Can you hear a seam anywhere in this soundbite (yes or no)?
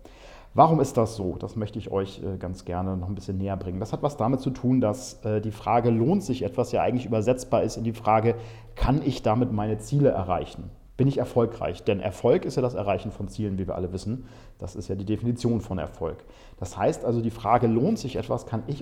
no